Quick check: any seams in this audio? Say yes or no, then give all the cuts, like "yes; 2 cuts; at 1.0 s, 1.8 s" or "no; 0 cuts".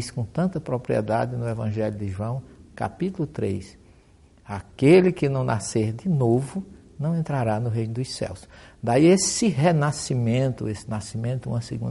no; 0 cuts